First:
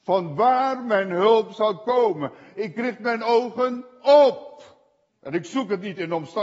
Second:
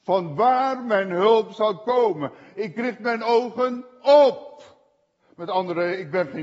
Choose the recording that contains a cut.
first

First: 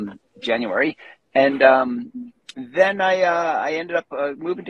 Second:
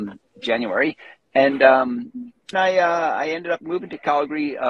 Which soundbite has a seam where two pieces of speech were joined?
second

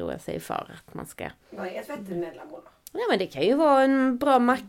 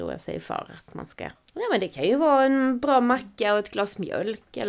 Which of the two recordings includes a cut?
second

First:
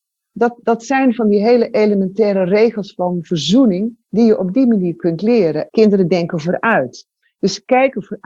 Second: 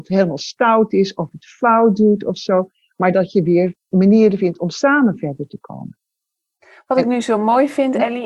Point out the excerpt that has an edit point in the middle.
first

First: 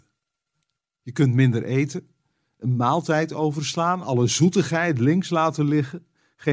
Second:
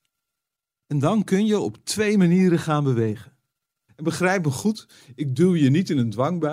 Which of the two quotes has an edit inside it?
second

